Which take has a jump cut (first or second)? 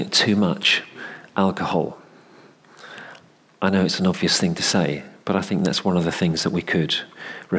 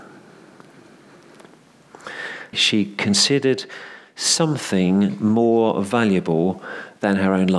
second